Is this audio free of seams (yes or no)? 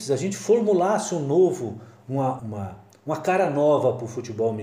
no